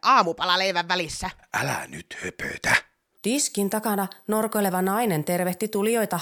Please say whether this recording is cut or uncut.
cut